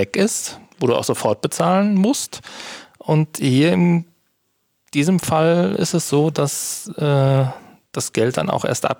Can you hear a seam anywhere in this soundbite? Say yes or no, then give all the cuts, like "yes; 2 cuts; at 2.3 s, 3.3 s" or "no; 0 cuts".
no; 0 cuts